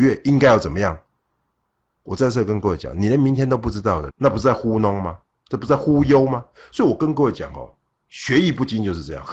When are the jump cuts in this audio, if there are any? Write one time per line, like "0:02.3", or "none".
0:04.1